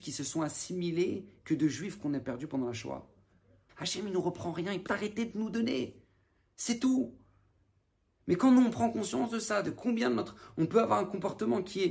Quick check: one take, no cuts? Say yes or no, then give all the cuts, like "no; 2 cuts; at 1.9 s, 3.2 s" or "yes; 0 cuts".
no; 2 cuts; at 3.7 s, 4.9 s